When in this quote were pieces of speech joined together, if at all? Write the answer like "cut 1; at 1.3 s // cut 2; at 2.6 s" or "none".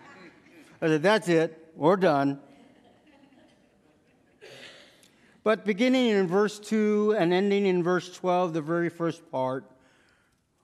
none